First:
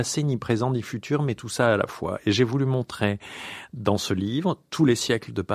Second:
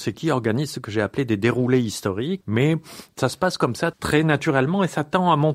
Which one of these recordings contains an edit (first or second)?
second